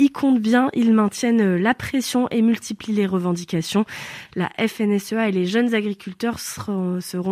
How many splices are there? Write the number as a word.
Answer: one